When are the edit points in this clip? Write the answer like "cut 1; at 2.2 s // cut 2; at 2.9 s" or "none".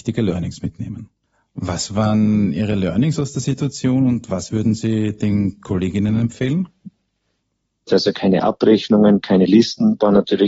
cut 1; at 7.9 s

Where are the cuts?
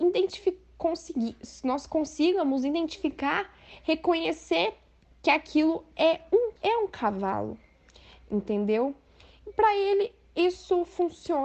cut 1; at 6.6 s

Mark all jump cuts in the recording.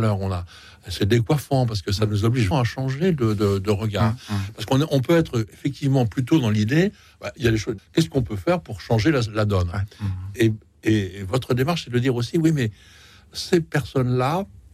cut 1; at 2.5 s // cut 2; at 7.8 s

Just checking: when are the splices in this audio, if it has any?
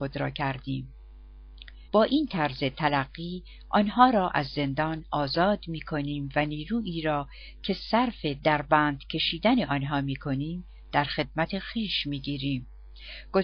cut 1; at 1.9 s

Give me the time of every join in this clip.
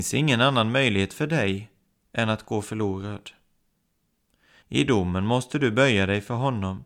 cut 1; at 4.6 s

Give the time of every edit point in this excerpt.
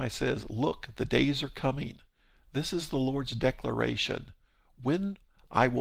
none

